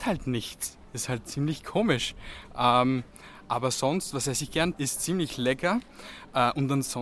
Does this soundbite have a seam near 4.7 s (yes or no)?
yes